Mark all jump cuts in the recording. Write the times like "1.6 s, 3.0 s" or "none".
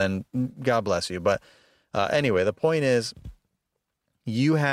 none